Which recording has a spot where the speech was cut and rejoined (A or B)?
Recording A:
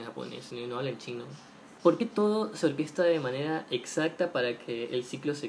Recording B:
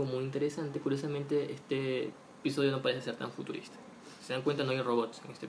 A